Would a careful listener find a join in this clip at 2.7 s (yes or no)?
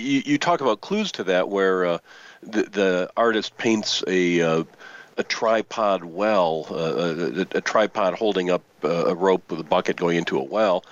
no